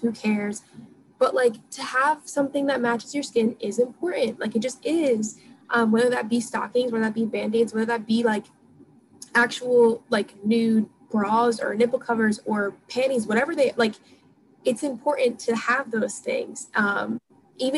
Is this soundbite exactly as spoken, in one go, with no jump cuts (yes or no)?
yes